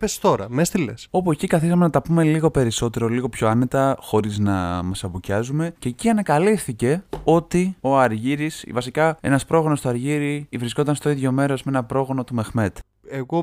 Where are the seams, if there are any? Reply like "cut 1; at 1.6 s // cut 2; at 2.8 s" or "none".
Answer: cut 1; at 1.1 s